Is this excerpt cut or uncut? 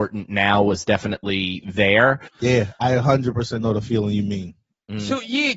cut